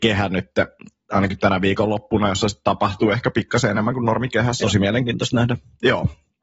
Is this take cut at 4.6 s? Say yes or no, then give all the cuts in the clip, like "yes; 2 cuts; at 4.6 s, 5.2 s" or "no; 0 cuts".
yes; 1 cut; at 4.6 s